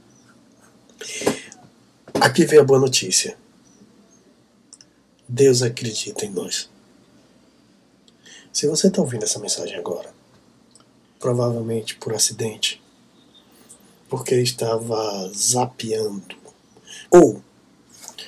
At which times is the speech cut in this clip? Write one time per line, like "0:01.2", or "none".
0:11.2
0:17.1